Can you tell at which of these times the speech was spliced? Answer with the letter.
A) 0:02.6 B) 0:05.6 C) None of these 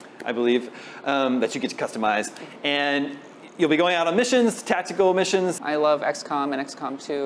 B